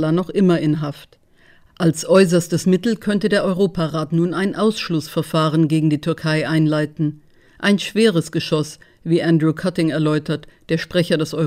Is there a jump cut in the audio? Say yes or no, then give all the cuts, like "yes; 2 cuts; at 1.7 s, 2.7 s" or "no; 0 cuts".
no; 0 cuts